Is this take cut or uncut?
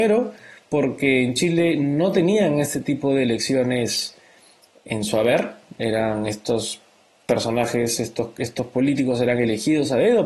uncut